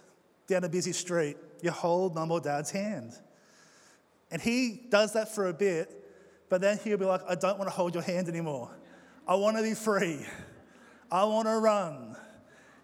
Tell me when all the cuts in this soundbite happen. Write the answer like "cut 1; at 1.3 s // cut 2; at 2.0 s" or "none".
none